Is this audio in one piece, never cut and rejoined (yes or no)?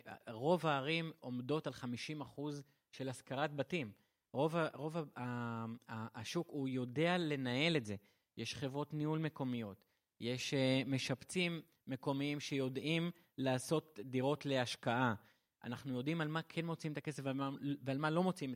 yes